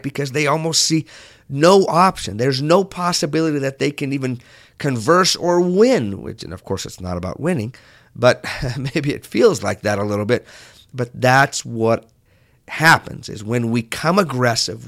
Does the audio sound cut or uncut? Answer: uncut